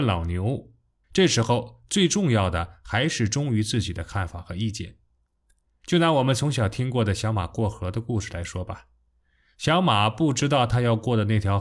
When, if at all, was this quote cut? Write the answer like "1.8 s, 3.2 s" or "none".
1.0 s